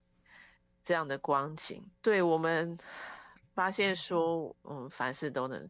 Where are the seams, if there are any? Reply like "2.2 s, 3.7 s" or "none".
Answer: 2.0 s, 4.6 s